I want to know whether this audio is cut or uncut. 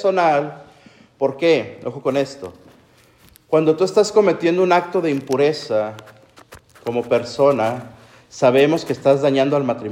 uncut